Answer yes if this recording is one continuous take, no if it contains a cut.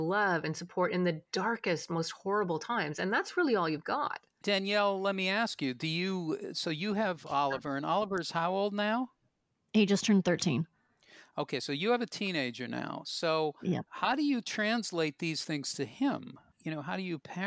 yes